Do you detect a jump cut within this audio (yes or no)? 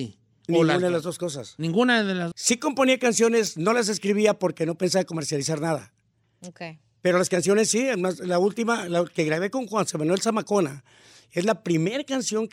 yes